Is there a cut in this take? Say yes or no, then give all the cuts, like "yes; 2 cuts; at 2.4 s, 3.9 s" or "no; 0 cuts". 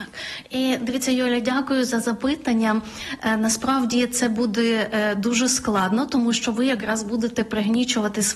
no; 0 cuts